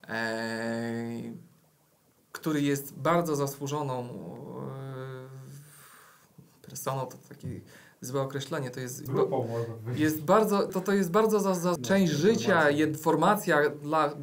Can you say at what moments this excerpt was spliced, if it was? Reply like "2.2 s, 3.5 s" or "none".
9.1 s, 10.7 s, 11.8 s